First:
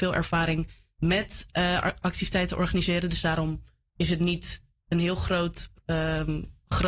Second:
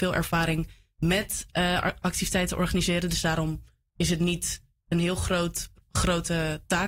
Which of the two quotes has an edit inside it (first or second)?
second